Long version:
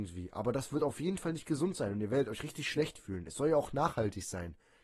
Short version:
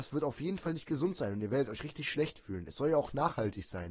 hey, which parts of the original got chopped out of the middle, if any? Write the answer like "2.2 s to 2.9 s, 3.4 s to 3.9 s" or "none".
none

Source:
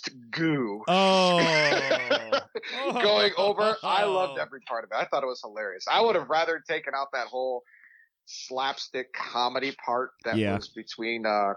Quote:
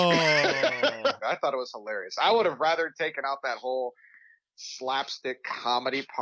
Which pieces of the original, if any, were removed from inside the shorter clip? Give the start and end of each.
2.5 s to 4.9 s

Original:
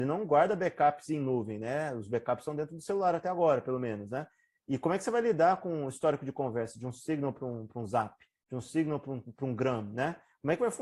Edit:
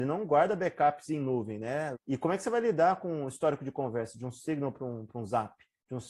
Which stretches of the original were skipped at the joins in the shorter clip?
1.9 s to 4.5 s

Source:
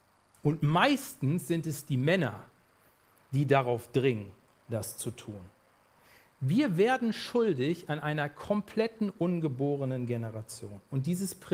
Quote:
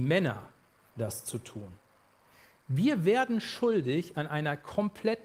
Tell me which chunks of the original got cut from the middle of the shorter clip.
2.9 s to 4.6 s

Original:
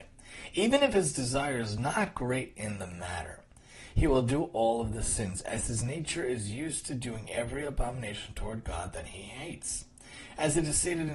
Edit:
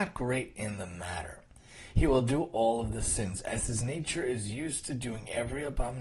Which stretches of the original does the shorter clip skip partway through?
none

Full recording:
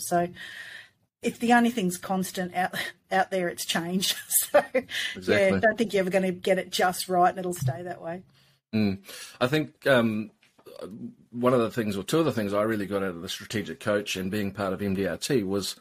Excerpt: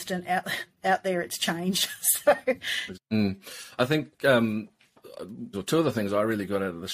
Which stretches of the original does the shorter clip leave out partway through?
5.2 s to 8.6 s, 11.1 s to 11.9 s

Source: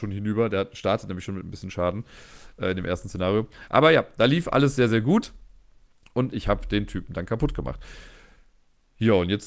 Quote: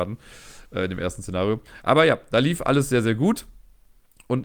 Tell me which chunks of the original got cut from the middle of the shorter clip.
none

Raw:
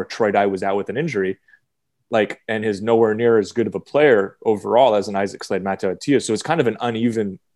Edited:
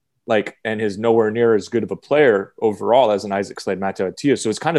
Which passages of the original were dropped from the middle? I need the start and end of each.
none

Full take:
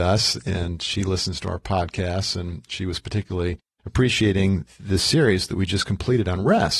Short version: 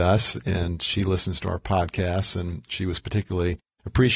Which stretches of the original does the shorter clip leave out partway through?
none

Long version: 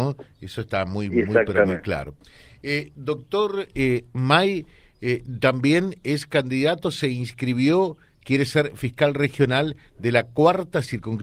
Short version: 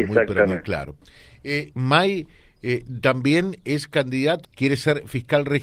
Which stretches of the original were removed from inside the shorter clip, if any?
2.9 s to 4.1 s, 6.8 s to 8.1 s

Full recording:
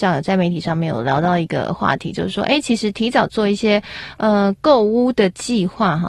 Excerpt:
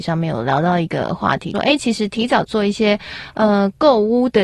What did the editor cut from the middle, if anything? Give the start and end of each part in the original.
2.1 s to 2.4 s

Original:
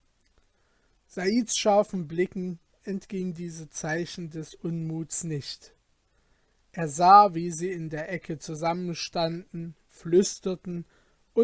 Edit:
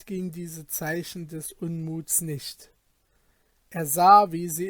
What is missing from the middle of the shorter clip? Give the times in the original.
none

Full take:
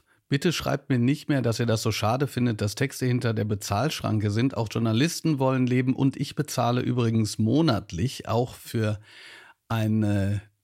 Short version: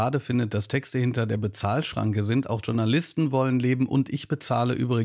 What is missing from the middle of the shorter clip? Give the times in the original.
none

